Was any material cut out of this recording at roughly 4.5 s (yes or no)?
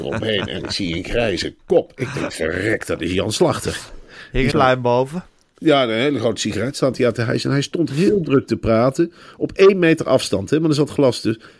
yes